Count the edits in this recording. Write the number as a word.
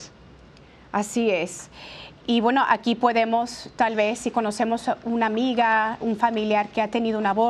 two